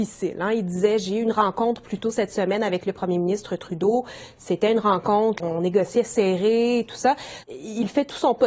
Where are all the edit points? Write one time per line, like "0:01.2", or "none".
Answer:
0:05.4
0:07.4